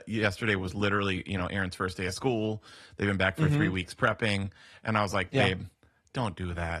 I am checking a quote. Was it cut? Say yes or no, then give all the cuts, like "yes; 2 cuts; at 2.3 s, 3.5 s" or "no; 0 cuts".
no; 0 cuts